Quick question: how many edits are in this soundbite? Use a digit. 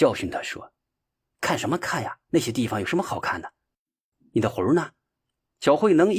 1